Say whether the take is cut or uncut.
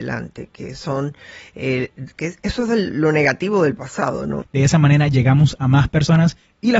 cut